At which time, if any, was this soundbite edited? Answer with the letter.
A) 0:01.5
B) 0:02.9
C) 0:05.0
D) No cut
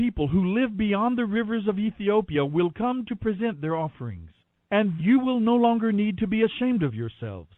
C